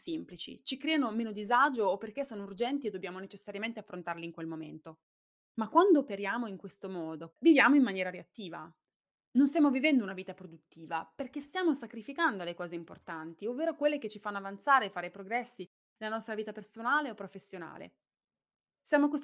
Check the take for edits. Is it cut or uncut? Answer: cut